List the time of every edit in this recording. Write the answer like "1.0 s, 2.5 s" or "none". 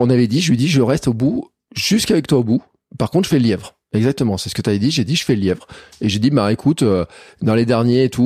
none